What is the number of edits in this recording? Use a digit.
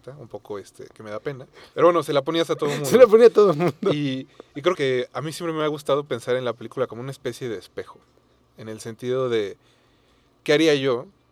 2